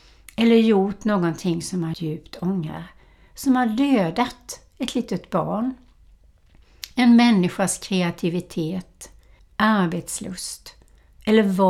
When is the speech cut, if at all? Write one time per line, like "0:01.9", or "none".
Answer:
0:01.9
0:09.4

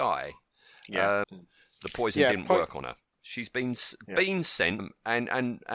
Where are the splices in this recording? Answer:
0:01.2
0:03.1
0:04.8

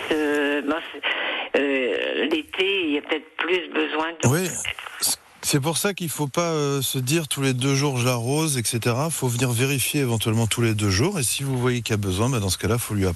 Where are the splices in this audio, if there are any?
none

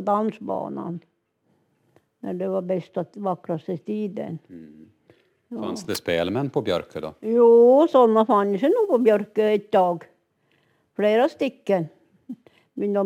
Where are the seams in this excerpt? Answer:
none

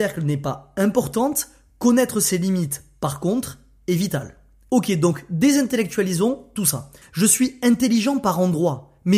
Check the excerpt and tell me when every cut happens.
0:04.7
0:07.0

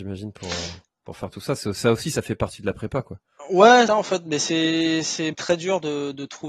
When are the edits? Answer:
0:03.9
0:05.3

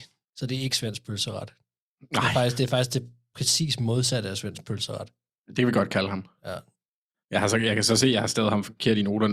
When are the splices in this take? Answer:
none

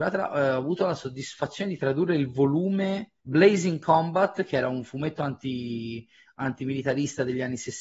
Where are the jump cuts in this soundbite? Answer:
0:03.2

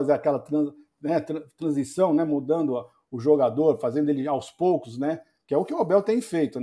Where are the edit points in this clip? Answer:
none

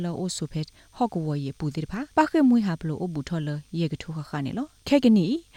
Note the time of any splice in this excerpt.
0:02.1

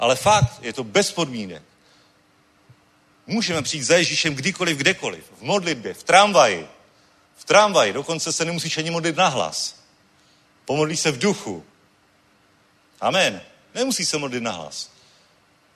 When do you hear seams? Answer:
none

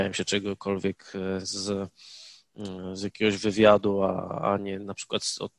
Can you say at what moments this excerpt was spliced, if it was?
none

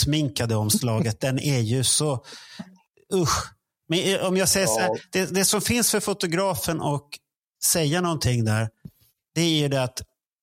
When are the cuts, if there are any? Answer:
none

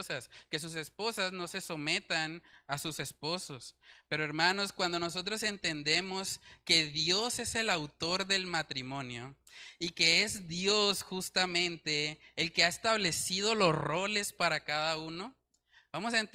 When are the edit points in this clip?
none

